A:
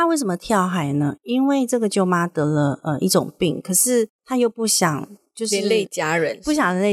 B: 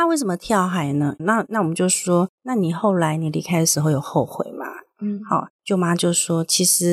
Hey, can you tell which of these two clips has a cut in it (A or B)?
B